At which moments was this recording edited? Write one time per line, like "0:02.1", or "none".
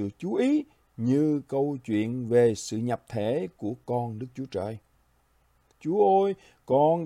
0:05.7